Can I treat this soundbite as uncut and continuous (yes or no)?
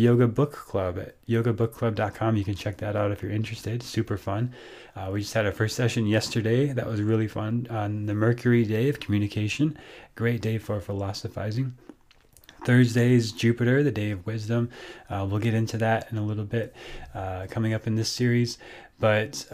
yes